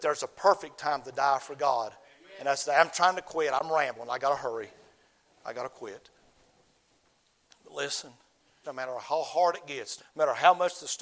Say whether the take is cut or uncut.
cut